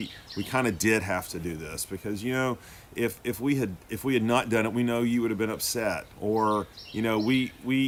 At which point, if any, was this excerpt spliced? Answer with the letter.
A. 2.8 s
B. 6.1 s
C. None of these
B